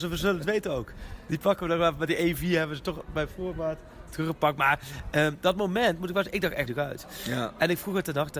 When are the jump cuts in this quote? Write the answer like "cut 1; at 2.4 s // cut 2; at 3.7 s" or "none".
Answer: cut 1; at 6.7 s